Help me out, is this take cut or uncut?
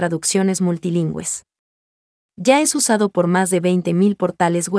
uncut